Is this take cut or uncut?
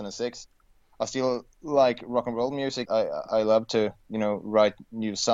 cut